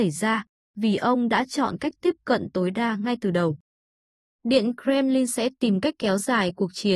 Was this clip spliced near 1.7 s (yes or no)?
no